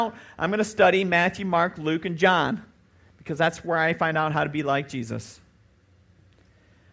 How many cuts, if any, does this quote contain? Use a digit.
0